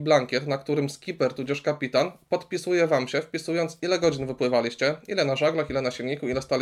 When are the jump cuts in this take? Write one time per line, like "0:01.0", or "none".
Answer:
none

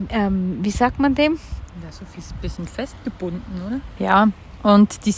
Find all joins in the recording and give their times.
0:04.0

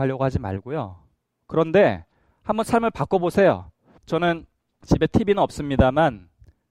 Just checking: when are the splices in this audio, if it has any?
0:01.4
0:04.0

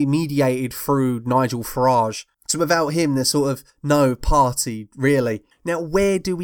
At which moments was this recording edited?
none

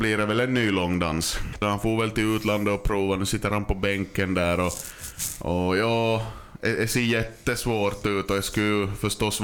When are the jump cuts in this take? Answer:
0:01.6

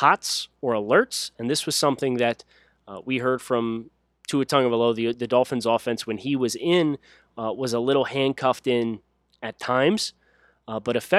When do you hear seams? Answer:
none

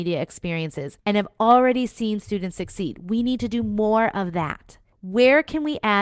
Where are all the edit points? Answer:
none

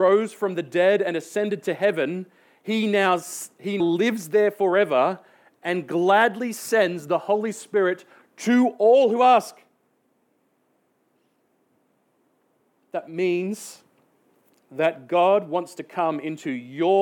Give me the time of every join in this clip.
0:03.8

